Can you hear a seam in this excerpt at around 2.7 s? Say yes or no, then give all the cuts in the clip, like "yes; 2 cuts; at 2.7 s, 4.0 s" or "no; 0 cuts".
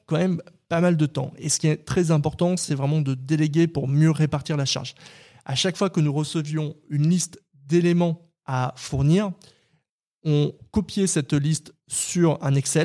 no; 0 cuts